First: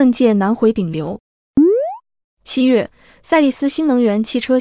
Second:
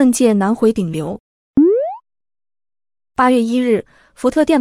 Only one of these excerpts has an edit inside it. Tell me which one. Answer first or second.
first